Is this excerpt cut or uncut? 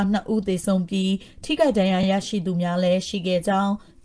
uncut